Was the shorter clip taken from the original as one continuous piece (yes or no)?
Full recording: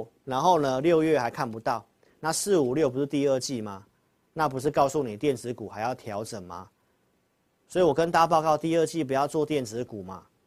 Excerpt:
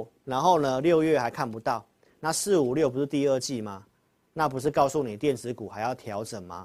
yes